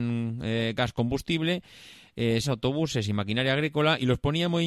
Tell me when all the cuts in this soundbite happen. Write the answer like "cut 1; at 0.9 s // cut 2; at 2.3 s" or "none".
cut 1; at 2.4 s